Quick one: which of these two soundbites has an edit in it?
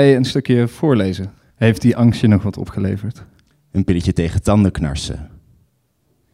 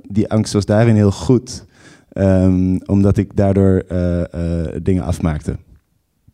first; 2 cuts; at 1.5 s, 3.5 s

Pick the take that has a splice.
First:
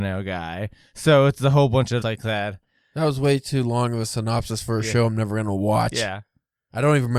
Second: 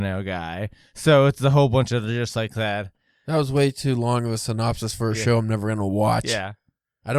first; 1 cut; at 2.0 s

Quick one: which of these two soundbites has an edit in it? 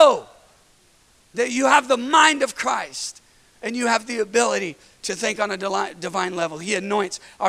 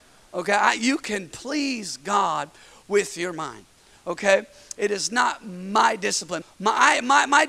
second; 2 cuts; at 4.7 s, 6.4 s

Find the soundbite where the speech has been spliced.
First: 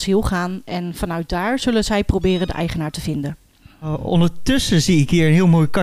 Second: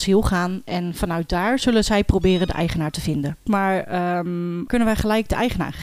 second; 2 cuts; at 3.5 s, 4.7 s

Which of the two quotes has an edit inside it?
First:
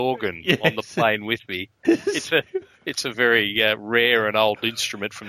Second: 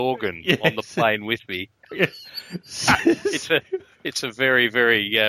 first; 2 cuts; at 1.8 s, 3.1 s

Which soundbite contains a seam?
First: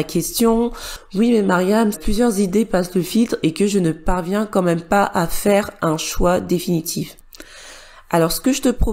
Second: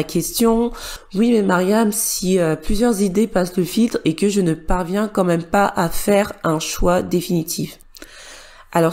first; 1 cut; at 1.9 s

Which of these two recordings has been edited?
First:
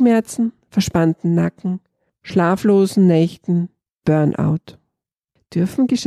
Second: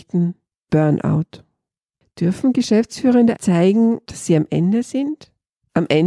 second; 1 cut; at 3.4 s

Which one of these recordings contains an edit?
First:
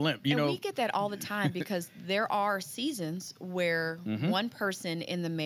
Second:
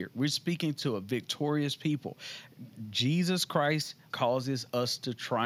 second; 1 cut; at 4.1 s

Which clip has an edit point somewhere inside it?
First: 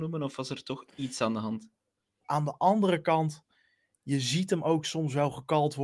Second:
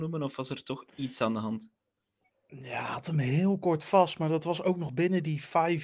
first; 1 cut; at 2.3 s

